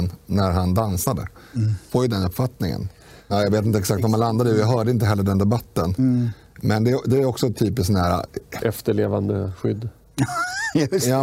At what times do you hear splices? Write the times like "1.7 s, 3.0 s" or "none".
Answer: 1.9 s, 3.3 s